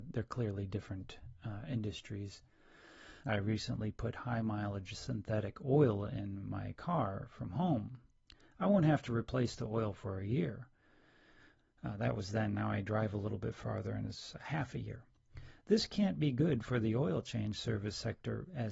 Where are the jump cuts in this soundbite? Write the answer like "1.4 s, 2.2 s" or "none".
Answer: 3.2 s

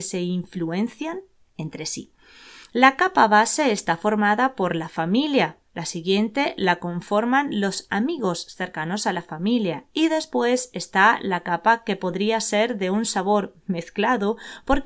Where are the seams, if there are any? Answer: none

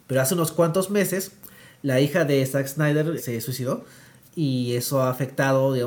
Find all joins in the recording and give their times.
3.2 s

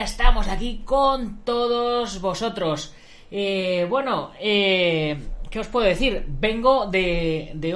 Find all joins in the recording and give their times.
none

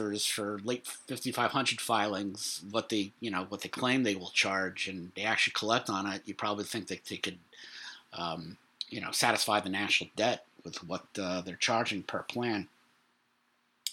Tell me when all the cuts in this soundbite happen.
none

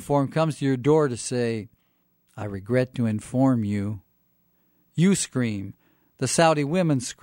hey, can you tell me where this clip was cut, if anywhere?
none

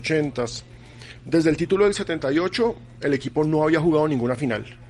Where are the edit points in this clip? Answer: 1.2 s

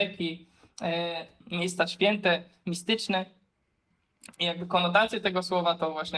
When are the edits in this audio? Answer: 4.3 s

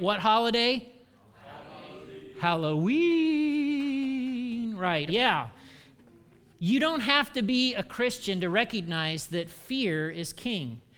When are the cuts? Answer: 5.1 s

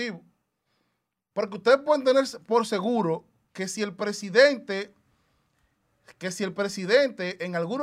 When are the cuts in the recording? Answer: 1.3 s

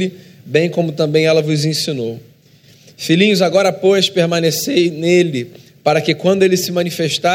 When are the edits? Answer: none

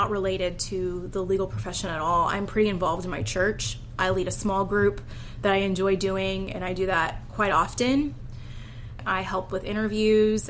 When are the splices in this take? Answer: 9.0 s

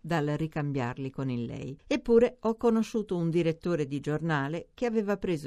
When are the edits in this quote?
1.8 s

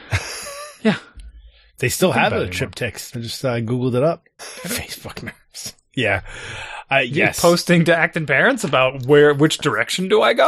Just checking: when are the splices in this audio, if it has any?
3.1 s, 4.4 s

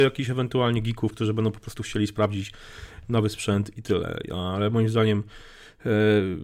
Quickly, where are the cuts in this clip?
1.1 s

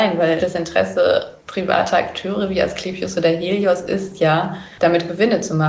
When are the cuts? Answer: 1.4 s

